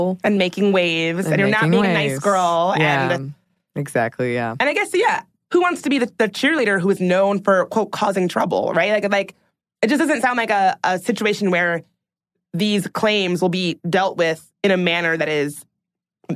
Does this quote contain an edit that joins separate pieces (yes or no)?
no